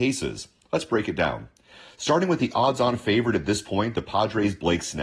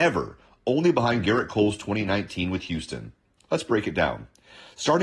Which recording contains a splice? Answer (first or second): second